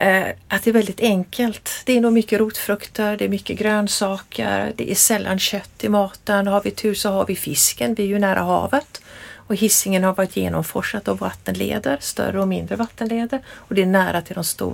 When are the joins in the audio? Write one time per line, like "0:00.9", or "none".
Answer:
none

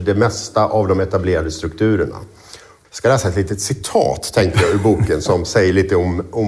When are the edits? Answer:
0:02.8

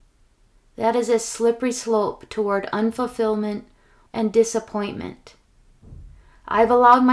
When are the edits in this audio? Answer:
0:04.1

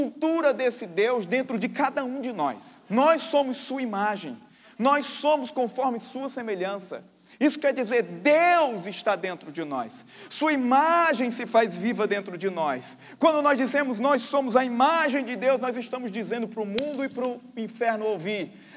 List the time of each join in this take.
0:02.9

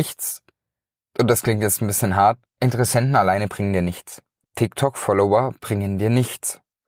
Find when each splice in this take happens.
0:02.5
0:04.4

